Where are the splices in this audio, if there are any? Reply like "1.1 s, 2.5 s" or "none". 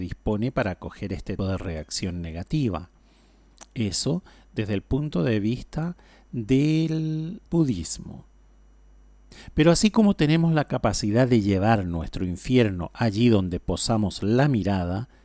1.4 s, 7.5 s